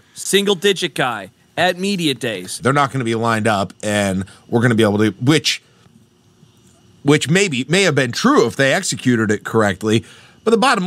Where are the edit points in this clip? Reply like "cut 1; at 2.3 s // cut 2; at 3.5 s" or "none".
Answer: cut 1; at 2.6 s